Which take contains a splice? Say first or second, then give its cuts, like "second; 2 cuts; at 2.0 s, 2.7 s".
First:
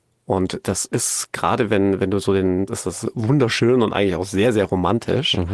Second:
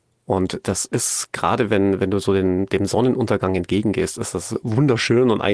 first; 1 cut; at 2.7 s